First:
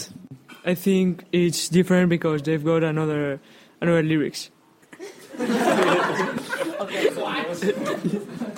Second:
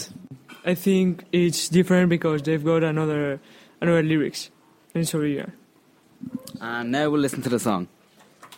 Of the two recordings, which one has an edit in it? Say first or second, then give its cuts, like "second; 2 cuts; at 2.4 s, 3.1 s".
first; 1 cut; at 4.8 s